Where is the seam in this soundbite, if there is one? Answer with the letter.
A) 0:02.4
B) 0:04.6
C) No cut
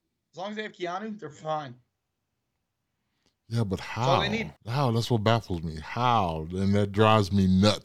B